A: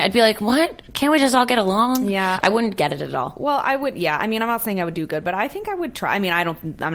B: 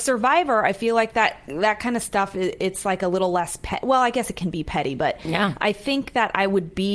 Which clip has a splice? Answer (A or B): A